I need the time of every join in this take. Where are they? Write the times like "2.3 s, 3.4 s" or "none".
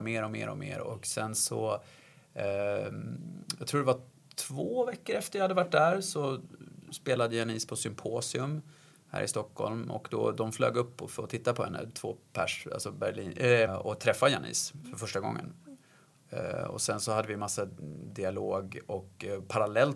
13.7 s